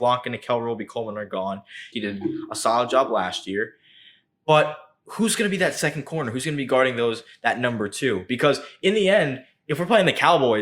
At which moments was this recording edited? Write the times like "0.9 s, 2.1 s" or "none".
1.9 s

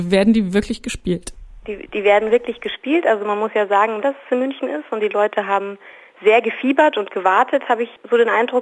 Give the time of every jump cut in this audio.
4.0 s

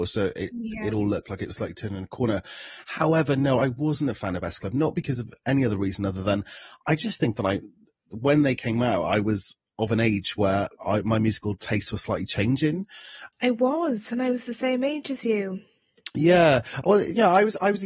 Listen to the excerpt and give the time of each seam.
13.3 s

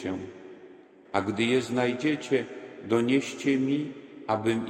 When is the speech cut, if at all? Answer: 1.1 s

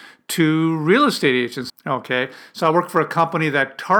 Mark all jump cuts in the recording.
1.7 s

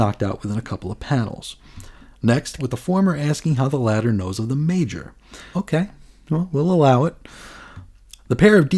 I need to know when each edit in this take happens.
2.6 s, 5.5 s

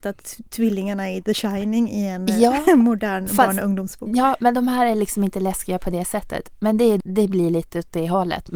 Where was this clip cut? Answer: 7.0 s

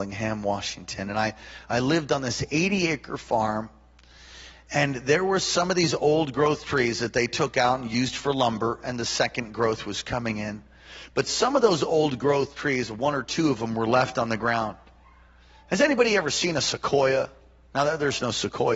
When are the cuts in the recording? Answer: none

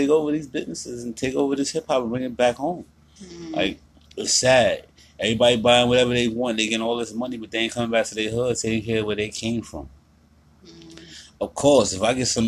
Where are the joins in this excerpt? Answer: none

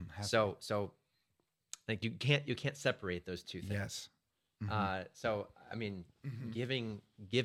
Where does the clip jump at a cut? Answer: none

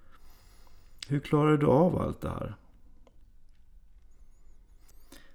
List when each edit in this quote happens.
1.1 s

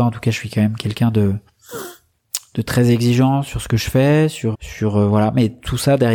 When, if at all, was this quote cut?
4.5 s

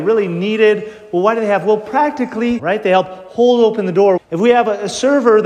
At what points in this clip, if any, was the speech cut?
2.6 s, 4.2 s

